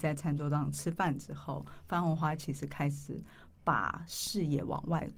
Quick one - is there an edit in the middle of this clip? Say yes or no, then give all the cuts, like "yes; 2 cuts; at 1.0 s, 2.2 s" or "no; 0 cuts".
no; 0 cuts